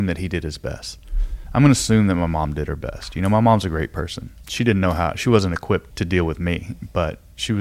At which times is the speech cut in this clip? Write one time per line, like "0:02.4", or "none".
0:05.9